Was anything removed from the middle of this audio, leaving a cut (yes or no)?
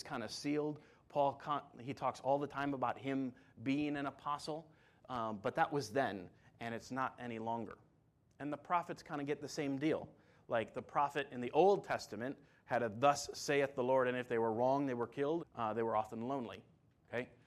yes